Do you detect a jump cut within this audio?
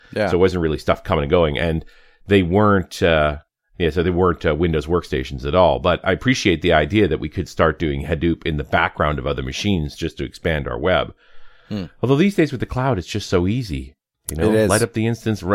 no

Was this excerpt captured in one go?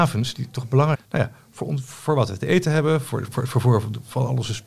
no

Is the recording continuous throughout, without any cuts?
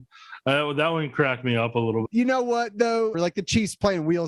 no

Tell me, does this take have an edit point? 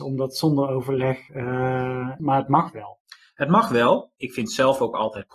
yes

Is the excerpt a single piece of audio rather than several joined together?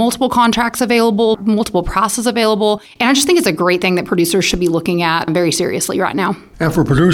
yes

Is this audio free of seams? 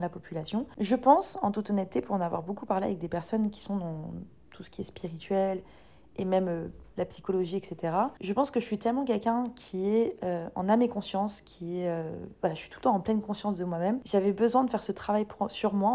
yes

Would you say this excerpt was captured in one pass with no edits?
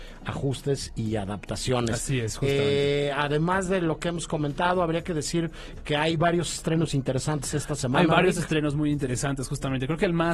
yes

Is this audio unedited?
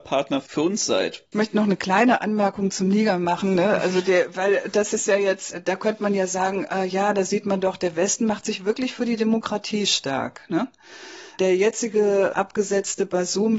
no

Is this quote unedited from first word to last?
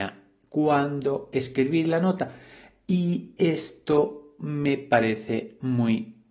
yes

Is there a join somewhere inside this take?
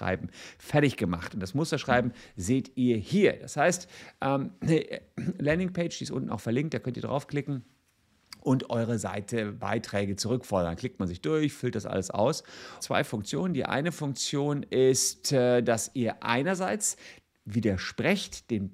yes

